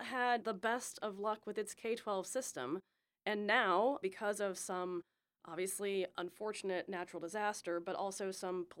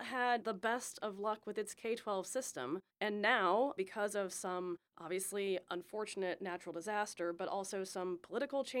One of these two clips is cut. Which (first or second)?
second